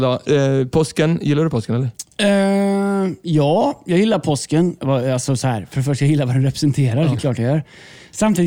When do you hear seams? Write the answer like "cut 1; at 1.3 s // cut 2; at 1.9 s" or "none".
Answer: cut 1; at 7.1 s